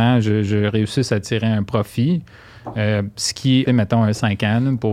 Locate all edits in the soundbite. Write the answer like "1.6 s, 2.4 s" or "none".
3.7 s